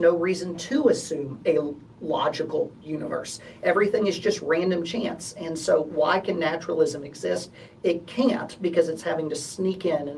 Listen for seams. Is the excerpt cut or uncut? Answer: uncut